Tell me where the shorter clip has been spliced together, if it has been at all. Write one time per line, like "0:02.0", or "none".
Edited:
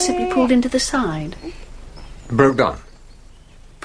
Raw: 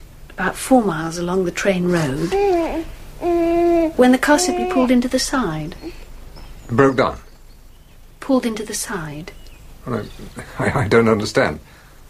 none